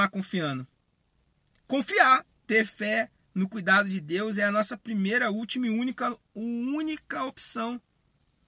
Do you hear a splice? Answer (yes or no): no